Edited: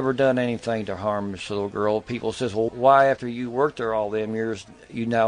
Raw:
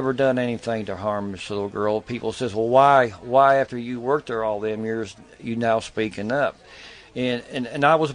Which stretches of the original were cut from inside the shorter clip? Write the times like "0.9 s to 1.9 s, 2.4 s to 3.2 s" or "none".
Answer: 2.7 s to 3.2 s